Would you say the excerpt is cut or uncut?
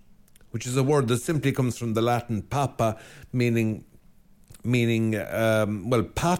uncut